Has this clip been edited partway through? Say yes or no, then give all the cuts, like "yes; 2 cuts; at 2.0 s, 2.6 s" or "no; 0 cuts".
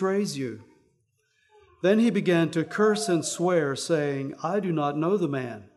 no; 0 cuts